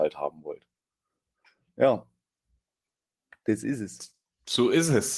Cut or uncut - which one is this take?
uncut